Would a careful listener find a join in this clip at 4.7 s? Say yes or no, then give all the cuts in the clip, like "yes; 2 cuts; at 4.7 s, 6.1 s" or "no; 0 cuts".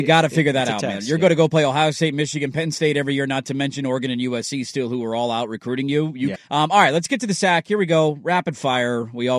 no; 1 cut; at 6.4 s